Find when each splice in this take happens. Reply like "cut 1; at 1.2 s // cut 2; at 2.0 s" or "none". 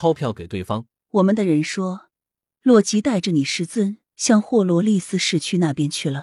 cut 1; at 1.0 s